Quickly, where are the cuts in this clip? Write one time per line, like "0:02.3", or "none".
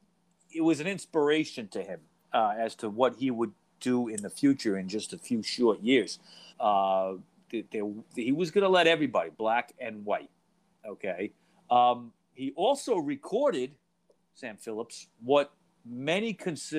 0:06.5
0:11.5